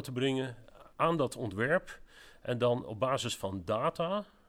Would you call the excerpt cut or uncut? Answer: cut